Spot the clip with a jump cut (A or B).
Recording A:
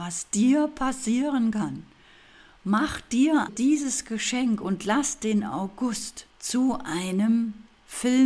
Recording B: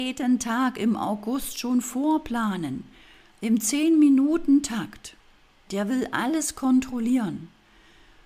A